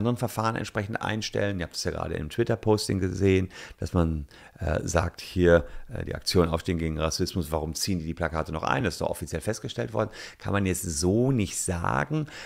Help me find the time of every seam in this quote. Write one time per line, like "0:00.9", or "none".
none